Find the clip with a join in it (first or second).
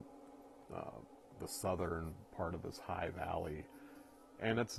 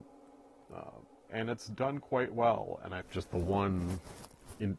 second